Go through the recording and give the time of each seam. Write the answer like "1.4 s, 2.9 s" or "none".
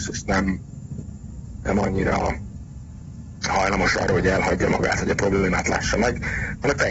none